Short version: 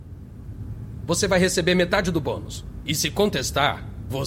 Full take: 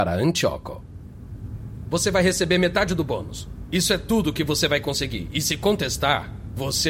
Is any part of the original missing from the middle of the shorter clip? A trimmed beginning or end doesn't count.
yes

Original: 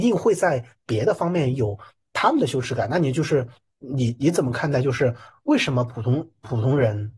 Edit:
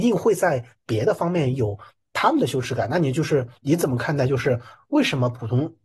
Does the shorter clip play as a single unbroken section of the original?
no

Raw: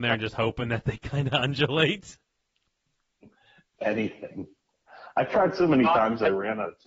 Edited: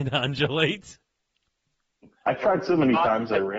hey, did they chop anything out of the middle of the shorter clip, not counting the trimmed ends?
yes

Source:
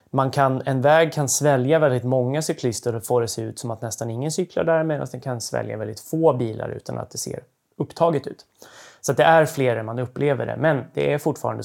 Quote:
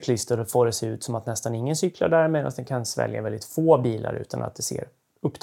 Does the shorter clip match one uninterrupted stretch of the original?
yes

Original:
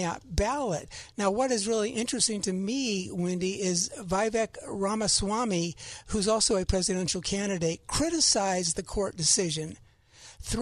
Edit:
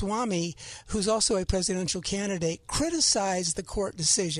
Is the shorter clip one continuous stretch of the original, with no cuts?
yes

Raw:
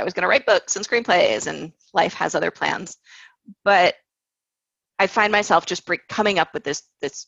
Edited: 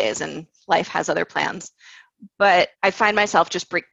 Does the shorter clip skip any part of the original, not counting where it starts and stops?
yes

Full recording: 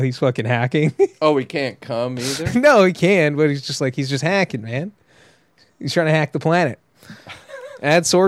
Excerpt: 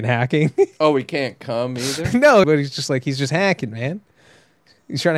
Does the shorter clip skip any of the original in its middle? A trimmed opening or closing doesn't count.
yes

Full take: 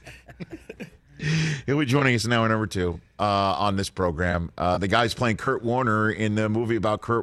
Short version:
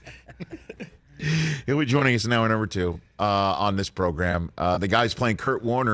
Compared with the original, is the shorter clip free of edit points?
yes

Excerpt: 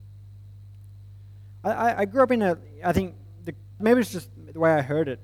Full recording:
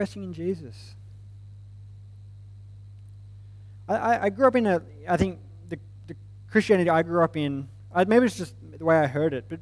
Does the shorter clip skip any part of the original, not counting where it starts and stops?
yes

